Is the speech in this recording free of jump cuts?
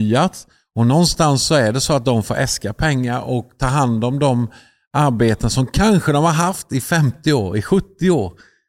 yes; 0 cuts

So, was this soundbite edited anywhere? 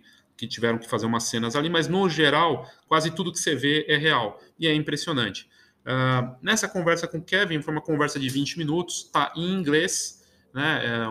no; 0 cuts

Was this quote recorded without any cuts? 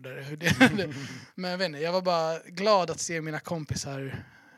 yes; 0 cuts

